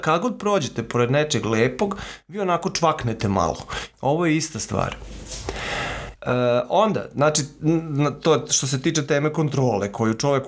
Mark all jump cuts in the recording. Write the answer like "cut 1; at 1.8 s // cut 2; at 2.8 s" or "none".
cut 1; at 3.9 s // cut 2; at 6.2 s